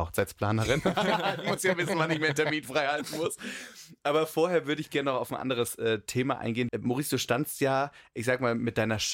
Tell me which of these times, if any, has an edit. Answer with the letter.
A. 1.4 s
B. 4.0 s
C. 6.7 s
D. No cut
C